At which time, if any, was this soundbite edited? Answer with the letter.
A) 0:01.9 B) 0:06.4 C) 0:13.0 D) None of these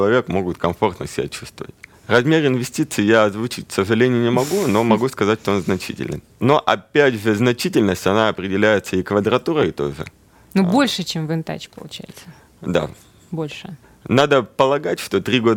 A